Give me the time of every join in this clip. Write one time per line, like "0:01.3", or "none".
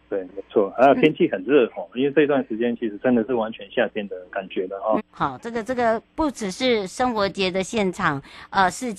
0:05.0
0:06.1